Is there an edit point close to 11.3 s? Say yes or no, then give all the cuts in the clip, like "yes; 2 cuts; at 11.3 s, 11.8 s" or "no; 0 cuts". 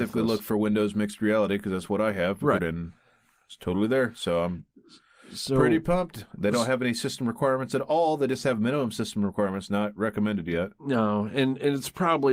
no; 1 cut; at 2.6 s